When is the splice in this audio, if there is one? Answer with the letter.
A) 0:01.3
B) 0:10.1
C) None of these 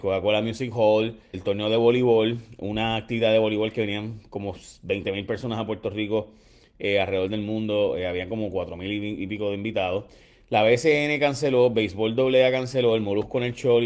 A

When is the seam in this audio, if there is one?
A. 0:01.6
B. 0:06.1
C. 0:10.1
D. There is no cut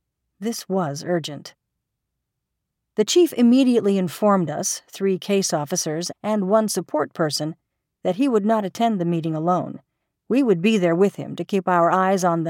B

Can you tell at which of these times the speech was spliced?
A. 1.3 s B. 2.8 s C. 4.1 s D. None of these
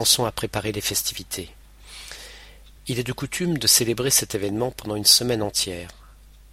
B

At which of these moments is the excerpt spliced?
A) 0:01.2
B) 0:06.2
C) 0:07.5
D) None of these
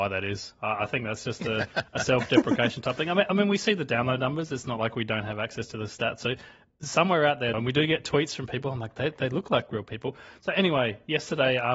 C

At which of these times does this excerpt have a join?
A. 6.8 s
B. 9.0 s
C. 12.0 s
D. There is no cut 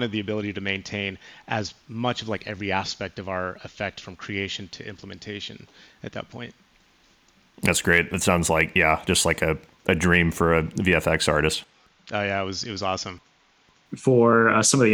D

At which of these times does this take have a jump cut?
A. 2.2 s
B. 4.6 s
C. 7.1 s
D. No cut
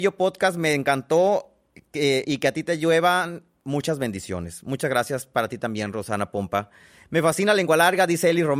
A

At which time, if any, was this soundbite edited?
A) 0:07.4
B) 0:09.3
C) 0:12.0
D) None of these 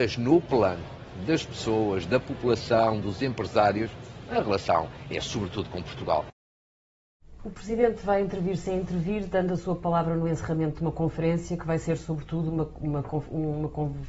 A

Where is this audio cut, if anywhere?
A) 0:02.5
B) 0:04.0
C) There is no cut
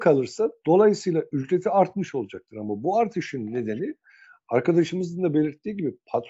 C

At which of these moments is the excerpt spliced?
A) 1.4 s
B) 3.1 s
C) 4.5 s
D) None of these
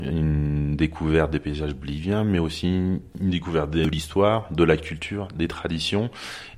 B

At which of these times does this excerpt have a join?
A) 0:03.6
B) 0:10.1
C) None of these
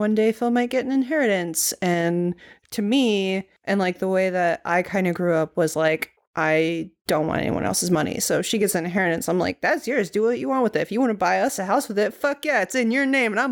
A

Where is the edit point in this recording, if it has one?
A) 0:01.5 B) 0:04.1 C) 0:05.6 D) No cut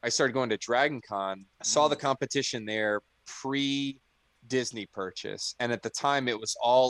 A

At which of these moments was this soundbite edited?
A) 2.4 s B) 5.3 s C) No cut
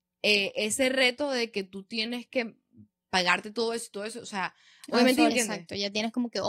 B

